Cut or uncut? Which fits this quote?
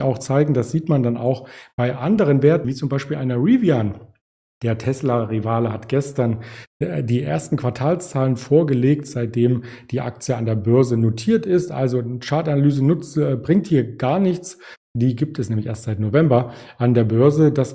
cut